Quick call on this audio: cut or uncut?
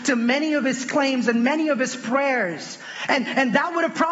uncut